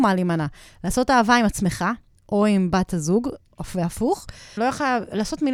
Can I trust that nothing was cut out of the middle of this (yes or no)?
no